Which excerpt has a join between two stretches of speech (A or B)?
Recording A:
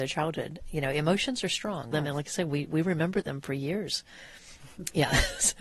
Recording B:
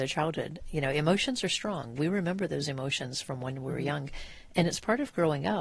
A